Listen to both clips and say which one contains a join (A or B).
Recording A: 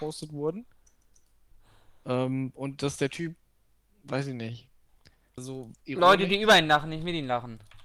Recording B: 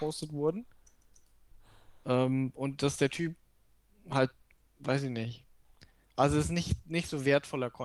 A